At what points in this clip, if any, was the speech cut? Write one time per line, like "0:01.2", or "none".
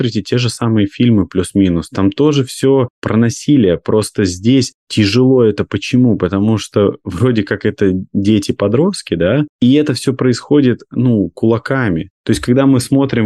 none